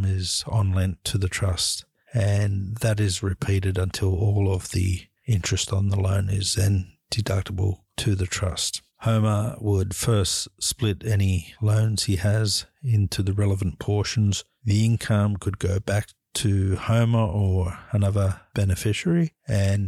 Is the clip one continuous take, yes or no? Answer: no